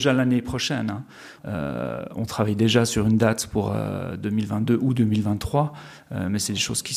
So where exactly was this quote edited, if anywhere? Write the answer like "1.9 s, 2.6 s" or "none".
1.4 s

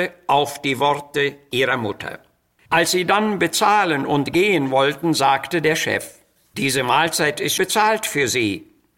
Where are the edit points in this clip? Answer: 2.6 s, 7.6 s

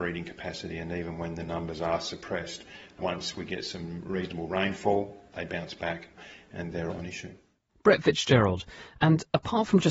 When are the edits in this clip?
6.9 s

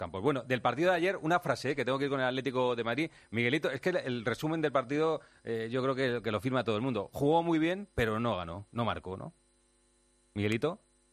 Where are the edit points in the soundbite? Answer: none

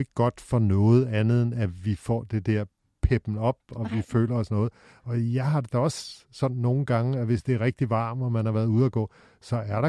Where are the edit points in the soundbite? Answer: none

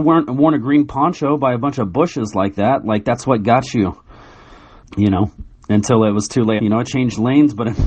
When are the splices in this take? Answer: 4.8 s, 6.6 s

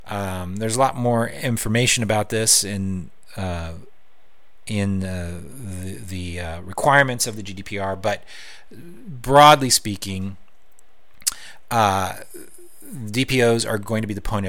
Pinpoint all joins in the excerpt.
none

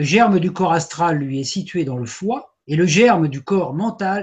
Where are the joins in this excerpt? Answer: 2.6 s

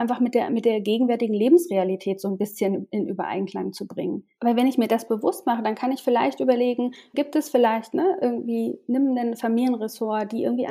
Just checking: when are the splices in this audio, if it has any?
4.4 s, 7.1 s

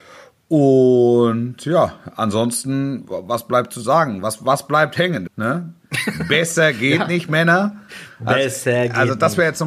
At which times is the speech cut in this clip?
5.3 s

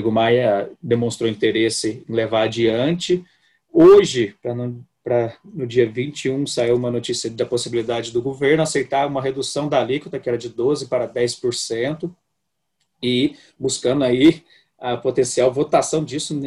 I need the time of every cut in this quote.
none

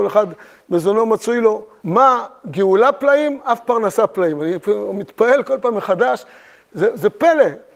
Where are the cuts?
1.8 s

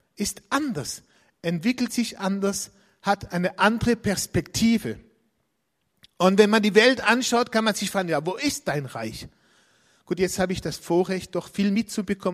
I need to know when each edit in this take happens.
none

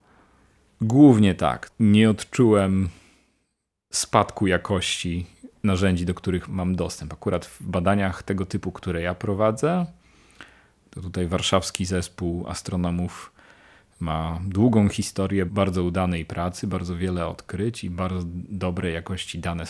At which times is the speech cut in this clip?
6.5 s

